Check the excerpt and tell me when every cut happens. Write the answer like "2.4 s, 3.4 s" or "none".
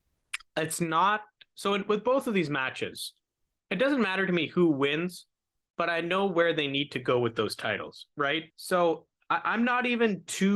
8.5 s